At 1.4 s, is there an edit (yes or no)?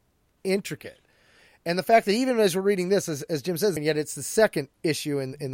no